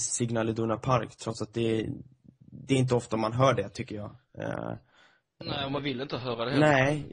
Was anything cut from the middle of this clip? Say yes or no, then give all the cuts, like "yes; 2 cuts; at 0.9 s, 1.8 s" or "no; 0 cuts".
no; 0 cuts